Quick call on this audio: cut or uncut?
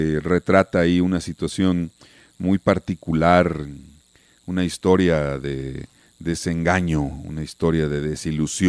uncut